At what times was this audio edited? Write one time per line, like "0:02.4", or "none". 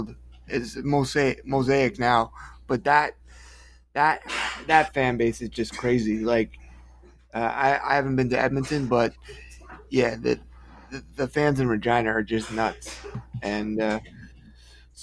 none